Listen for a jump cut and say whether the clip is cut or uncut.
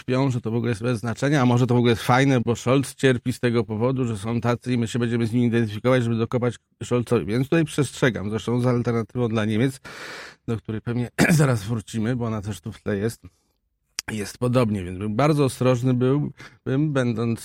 cut